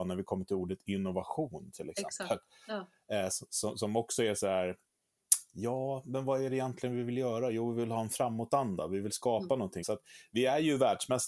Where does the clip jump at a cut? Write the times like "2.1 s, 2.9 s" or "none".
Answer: 9.8 s